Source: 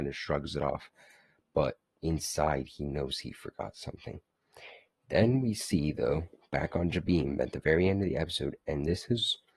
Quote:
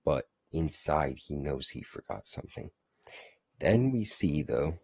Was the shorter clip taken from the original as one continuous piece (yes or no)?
yes